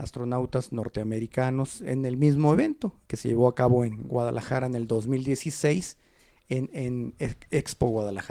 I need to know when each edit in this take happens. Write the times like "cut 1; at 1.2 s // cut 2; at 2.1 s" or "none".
cut 1; at 3.1 s